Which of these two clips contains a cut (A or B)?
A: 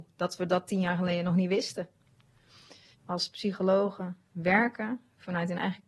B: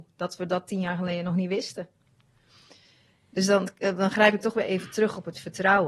A